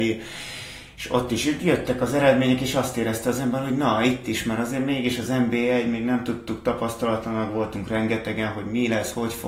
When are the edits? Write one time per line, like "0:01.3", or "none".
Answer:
none